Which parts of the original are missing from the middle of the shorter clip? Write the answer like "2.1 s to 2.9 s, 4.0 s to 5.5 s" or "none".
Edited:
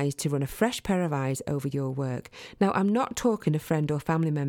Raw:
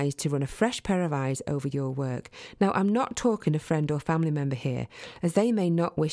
none